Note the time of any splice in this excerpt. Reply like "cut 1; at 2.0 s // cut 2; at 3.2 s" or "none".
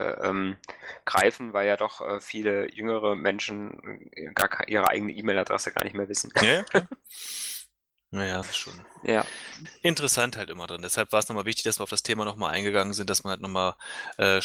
cut 1; at 8.4 s